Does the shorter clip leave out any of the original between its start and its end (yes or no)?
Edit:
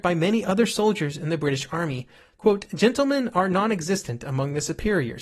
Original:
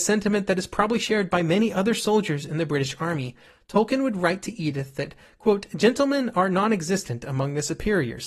yes